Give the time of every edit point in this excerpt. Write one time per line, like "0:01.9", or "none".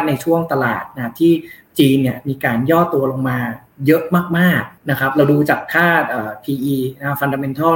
0:04.8